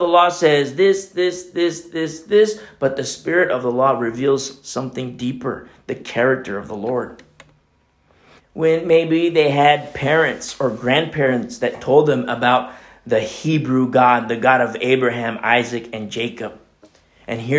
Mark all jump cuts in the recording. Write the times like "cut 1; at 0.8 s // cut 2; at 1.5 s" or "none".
cut 1; at 8.4 s